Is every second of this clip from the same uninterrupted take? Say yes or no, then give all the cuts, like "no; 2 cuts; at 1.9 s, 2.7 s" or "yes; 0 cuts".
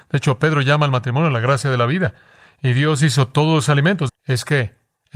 no; 1 cut; at 4.1 s